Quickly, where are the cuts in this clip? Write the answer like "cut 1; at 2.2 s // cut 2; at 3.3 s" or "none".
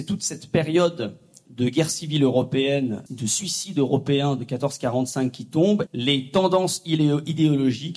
cut 1; at 3.1 s // cut 2; at 5.9 s